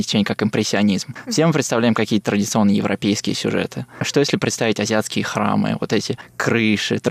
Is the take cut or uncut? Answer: uncut